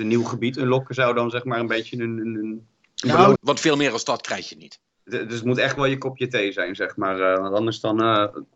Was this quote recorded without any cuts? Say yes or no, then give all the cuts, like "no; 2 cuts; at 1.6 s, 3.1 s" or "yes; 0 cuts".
no; 1 cut; at 3.4 s